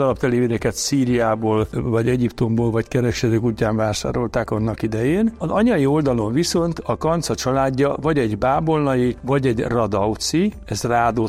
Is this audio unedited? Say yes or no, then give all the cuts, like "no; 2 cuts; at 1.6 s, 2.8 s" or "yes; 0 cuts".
yes; 0 cuts